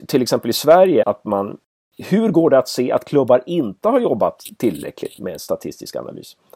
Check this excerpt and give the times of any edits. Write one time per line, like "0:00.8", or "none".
0:01.0
0:05.2